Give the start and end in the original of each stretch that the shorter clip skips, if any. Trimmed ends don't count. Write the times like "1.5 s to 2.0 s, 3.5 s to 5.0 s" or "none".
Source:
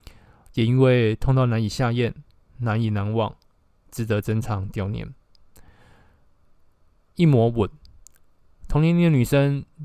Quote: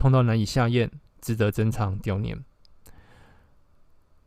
2.3 s to 3.8 s